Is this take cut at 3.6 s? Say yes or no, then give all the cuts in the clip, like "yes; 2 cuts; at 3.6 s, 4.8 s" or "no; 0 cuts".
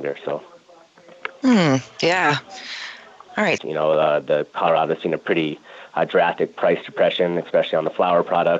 yes; 1 cut; at 3.6 s